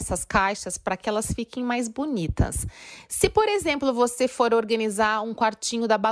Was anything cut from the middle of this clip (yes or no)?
no